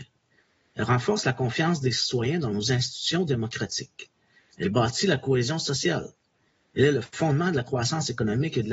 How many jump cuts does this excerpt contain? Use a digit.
0